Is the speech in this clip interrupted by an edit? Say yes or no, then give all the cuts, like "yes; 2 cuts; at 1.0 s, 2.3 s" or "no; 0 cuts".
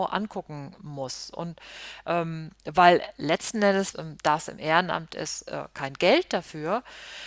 yes; 1 cut; at 3.9 s